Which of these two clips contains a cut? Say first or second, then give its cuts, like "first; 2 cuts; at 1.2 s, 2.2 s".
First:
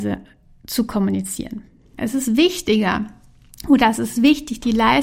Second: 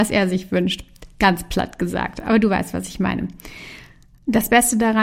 first; 1 cut; at 1.9 s